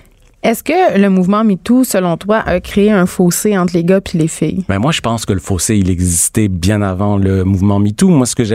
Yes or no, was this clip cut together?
no